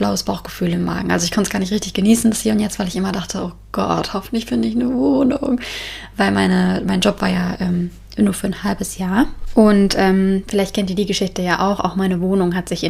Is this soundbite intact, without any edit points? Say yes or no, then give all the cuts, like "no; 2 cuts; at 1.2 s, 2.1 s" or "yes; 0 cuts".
yes; 0 cuts